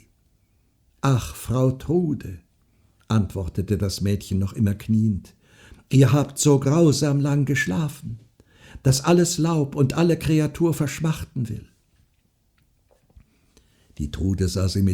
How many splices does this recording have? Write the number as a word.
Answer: zero